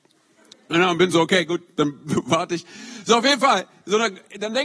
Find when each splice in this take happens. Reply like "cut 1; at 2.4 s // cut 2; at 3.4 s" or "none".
cut 1; at 3.0 s